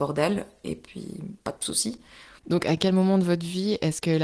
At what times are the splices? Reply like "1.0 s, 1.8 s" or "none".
2.4 s

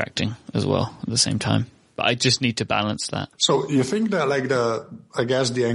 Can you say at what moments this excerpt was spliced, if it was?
none

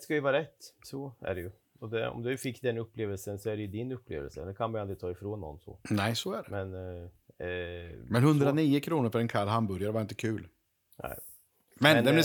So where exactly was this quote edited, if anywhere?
none

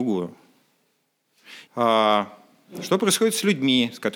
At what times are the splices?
1.7 s

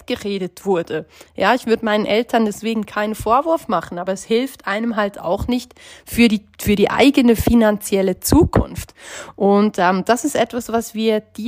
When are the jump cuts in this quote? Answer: none

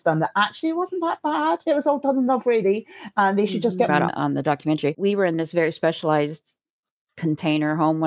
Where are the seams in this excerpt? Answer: 3.9 s, 4.9 s

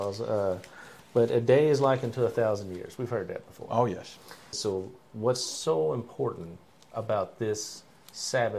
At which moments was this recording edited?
4.5 s

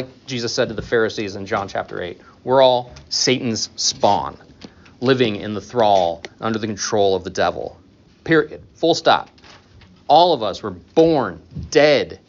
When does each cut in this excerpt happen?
8.1 s

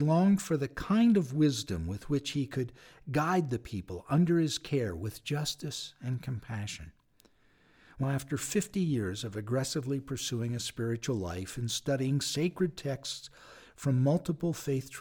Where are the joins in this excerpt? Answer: 8.0 s

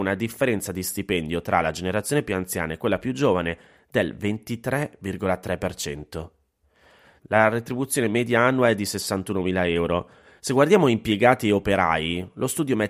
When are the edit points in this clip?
7.2 s, 10.4 s

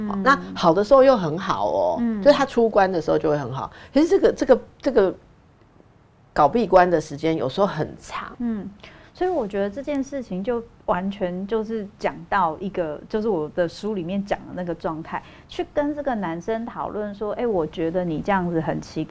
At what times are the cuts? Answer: 8.3 s

